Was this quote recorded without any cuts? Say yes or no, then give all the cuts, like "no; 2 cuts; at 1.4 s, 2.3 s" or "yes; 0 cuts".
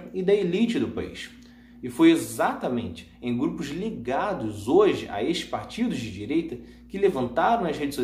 yes; 0 cuts